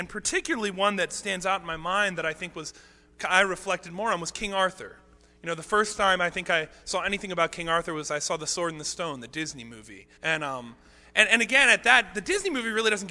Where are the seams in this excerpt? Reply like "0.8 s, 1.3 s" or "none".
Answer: 10.2 s